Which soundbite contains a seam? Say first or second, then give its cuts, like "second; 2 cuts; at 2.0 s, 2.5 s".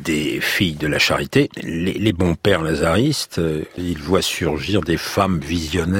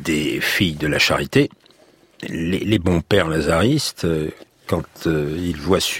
first; 2 cuts; at 1.5 s, 3.8 s